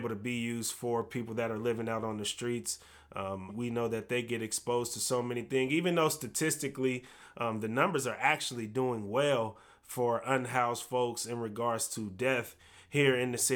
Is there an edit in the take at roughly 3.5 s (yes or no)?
yes